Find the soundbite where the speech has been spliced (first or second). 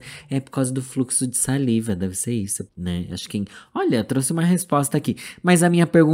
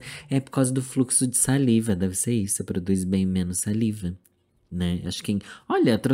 first